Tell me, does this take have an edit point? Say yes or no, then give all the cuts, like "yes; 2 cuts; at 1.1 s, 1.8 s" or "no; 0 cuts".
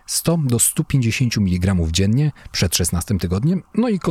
no; 0 cuts